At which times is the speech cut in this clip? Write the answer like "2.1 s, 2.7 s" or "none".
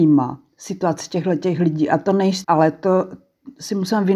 2.4 s